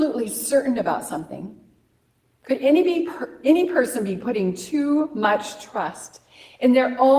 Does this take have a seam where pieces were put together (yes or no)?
no